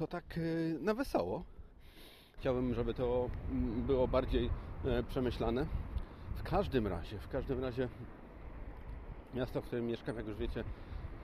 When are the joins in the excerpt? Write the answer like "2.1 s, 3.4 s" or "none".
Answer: 2.4 s